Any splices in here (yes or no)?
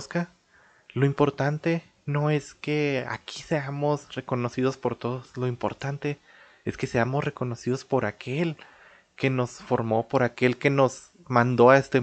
no